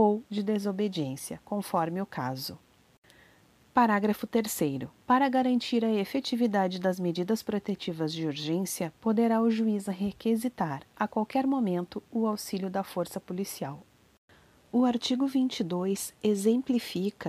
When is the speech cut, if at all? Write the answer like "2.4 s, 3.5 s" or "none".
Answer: none